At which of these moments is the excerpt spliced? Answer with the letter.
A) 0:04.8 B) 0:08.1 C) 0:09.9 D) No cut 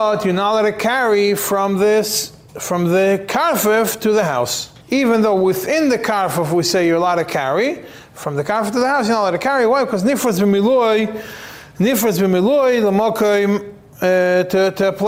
A